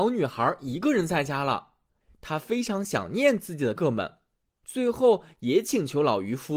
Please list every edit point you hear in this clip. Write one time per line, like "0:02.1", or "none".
0:03.8